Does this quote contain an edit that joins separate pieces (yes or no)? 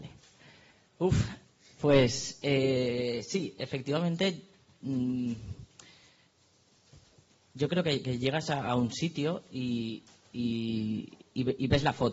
no